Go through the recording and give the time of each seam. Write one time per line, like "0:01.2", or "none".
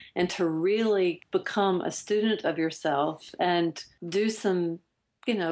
none